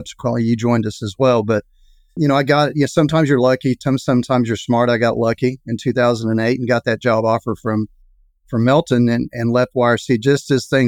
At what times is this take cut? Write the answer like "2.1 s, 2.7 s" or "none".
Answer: 2.2 s